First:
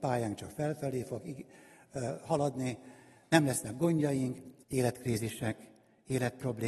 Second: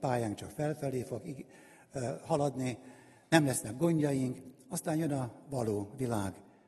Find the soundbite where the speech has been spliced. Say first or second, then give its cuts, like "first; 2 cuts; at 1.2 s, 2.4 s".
first; 1 cut; at 4.6 s